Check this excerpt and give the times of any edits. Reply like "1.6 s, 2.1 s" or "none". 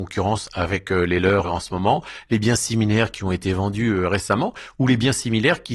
none